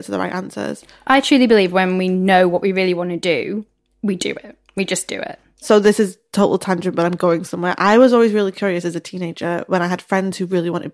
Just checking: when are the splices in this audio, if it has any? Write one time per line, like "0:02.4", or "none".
none